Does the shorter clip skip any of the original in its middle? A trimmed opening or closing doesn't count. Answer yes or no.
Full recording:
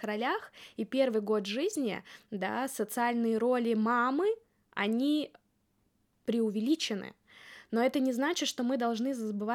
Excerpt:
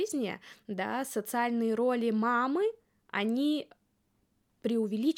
no